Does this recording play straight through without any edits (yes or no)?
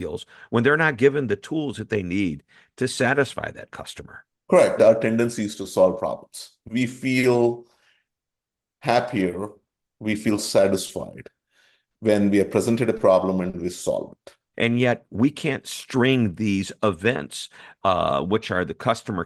no